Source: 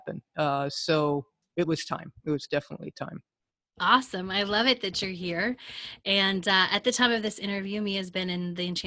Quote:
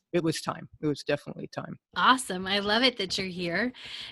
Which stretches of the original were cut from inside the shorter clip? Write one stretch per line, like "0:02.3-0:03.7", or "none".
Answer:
0:03.3-0:03.7